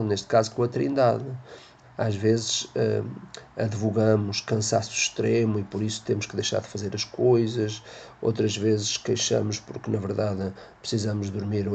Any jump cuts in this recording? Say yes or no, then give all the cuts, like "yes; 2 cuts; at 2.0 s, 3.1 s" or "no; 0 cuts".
yes; 1 cut; at 1.8 s